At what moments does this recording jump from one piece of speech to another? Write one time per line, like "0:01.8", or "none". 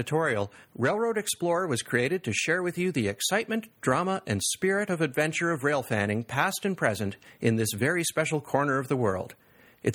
none